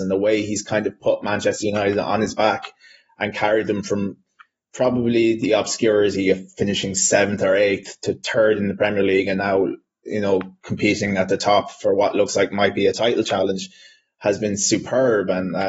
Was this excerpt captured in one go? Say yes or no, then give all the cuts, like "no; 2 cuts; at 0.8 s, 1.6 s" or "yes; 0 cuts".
yes; 0 cuts